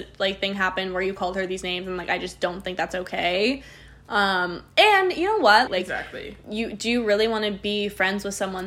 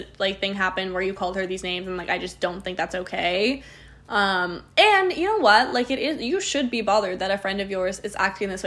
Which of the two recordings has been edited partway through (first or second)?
first